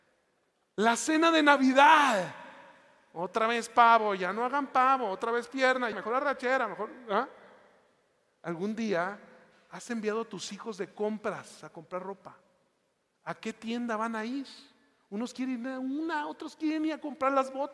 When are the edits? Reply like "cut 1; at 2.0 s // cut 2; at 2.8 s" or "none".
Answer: cut 1; at 5.9 s